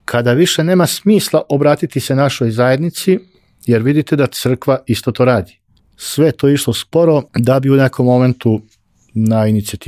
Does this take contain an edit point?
yes; 2 cuts; at 5.8 s, 7.3 s

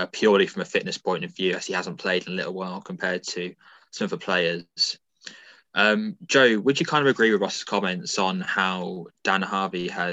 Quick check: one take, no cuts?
yes; 0 cuts

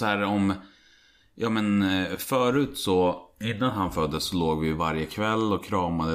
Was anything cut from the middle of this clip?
no; 0 cuts

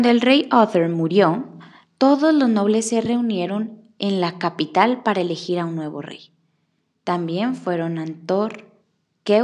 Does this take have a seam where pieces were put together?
no; 0 cuts

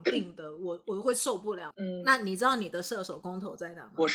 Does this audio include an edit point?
yes; 1 cut; at 1.7 s

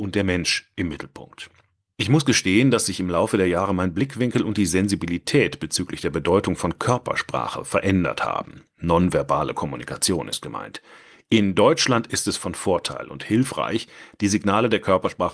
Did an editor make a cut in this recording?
no; 0 cuts

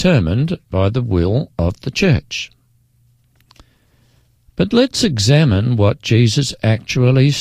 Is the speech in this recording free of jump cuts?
yes; 0 cuts

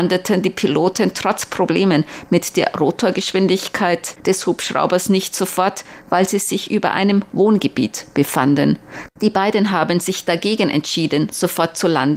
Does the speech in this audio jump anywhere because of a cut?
yes; 1 cut; at 9.1 s

